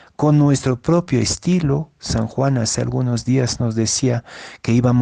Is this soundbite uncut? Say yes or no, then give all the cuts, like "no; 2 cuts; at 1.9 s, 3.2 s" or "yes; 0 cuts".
yes; 0 cuts